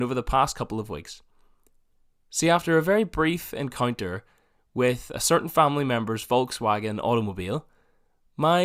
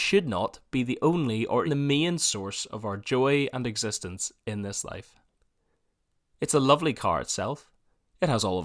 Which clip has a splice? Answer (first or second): second